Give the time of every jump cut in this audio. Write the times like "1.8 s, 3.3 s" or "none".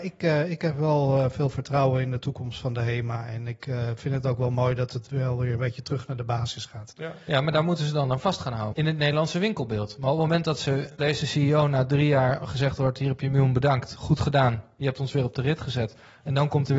8.7 s, 11.0 s